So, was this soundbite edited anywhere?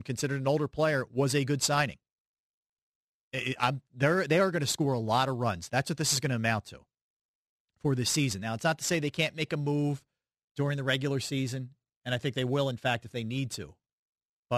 yes; 2 cuts; at 3.2 s, 5.7 s

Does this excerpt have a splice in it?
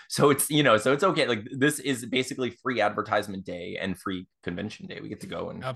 no; 0 cuts

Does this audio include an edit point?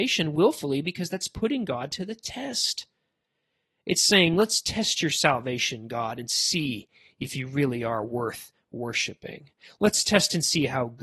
no; 0 cuts

